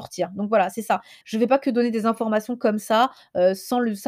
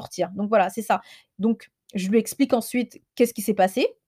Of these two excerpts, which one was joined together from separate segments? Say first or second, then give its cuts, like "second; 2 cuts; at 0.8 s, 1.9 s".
first; 1 cut; at 1.2 s